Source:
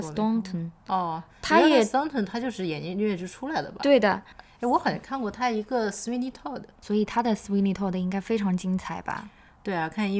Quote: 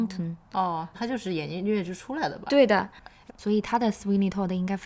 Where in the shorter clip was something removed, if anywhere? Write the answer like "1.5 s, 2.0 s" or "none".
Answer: 0.9 s, 3.3 s